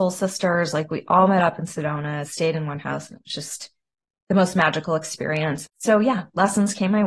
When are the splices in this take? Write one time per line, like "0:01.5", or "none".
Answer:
0:05.6